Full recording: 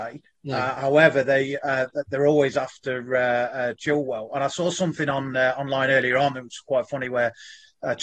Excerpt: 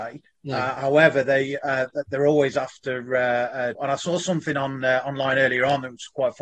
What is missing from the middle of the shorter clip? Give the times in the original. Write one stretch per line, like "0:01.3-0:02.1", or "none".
0:03.7-0:04.3

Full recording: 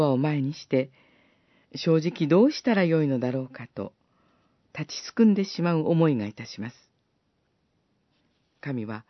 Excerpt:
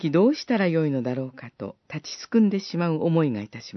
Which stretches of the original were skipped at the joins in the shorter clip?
0:04.0-0:04.7

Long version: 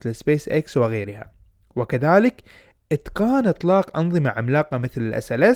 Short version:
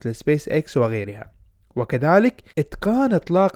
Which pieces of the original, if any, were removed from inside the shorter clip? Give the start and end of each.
0:02.5-0:02.8

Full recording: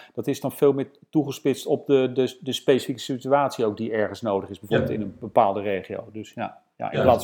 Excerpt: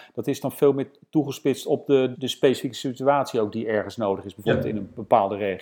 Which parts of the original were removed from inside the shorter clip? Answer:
0:02.1-0:02.4

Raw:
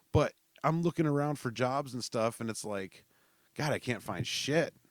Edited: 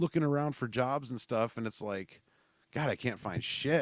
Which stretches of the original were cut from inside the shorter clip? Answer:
none

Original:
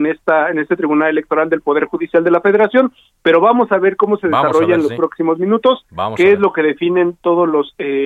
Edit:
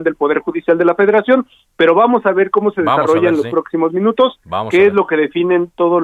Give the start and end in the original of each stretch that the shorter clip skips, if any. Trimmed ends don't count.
none

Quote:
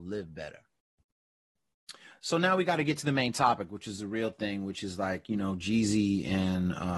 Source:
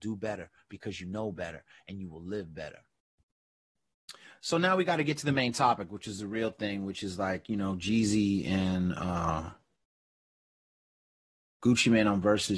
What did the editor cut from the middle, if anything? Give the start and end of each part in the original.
none

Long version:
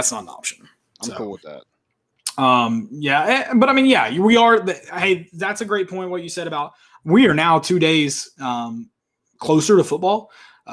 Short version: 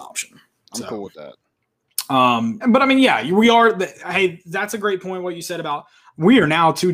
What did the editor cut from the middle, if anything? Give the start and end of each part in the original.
0:02.9-0:03.5

